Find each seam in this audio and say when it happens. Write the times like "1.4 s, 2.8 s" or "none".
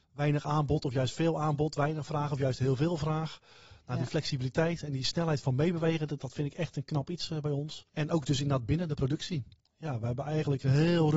7.9 s